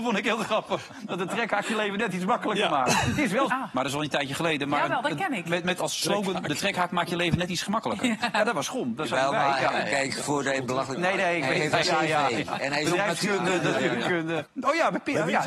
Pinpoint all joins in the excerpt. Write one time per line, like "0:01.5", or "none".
0:03.5
0:11.8
0:14.5